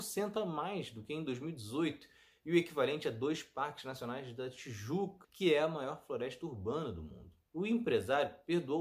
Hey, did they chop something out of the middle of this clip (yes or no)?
yes